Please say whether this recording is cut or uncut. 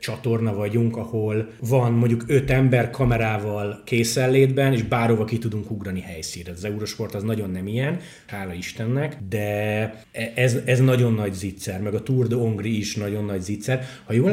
cut